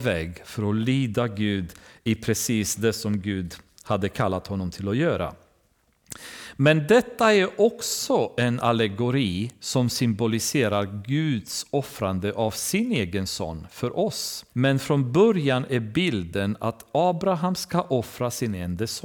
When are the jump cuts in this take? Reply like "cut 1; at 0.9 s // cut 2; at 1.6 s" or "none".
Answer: cut 1; at 14.5 s